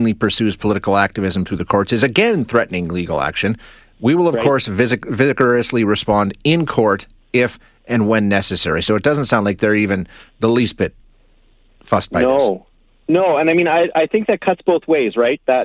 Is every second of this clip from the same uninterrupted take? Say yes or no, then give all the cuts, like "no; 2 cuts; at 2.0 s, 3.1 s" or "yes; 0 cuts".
yes; 0 cuts